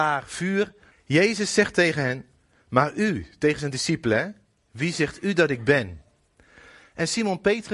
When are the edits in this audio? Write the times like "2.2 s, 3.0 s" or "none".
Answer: 0.9 s